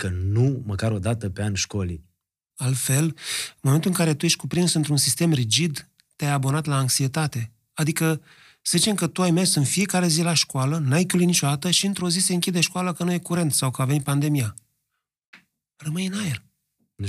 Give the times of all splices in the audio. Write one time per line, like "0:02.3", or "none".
0:02.5